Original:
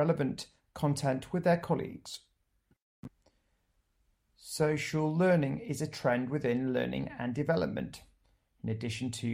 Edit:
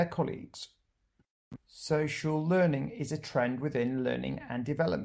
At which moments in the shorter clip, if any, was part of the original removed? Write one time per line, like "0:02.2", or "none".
0:01.6